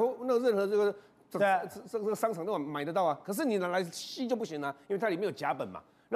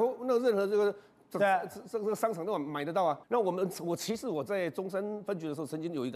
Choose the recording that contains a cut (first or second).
second